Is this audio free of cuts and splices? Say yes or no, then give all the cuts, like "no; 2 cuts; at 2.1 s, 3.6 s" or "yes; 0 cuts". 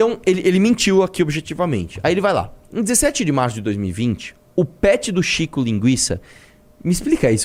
yes; 0 cuts